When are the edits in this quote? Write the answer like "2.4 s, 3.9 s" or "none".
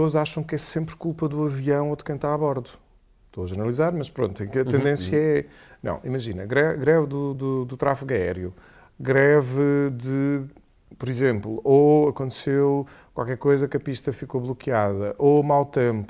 none